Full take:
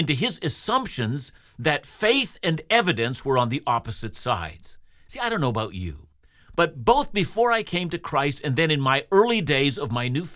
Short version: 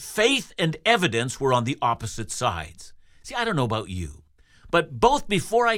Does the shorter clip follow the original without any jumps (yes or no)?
yes